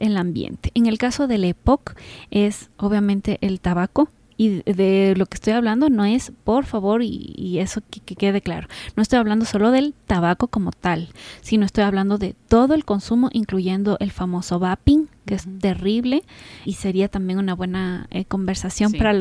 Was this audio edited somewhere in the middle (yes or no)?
yes